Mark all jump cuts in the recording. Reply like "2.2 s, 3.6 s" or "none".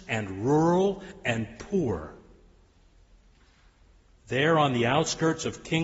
none